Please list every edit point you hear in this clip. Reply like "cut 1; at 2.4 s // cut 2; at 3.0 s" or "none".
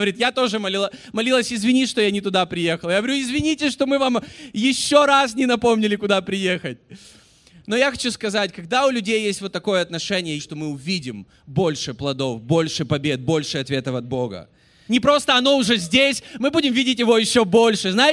cut 1; at 10.4 s // cut 2; at 14.9 s